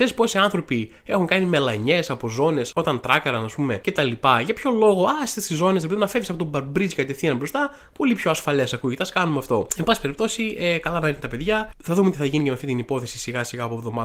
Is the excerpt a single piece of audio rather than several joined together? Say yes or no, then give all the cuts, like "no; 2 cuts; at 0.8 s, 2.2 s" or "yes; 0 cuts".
yes; 0 cuts